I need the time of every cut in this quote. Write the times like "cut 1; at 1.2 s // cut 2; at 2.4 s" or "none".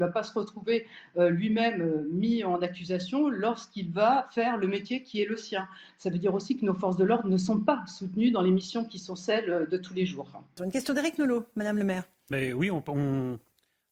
cut 1; at 10.6 s